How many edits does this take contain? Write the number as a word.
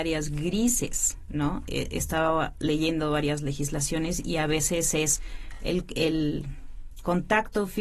zero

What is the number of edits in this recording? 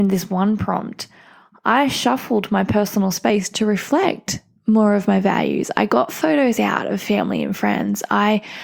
zero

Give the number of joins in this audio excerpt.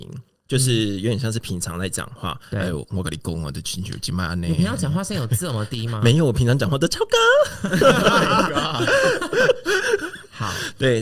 one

